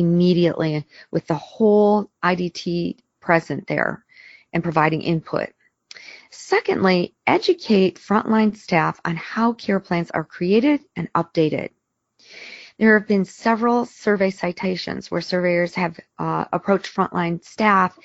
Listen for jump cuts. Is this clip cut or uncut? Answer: uncut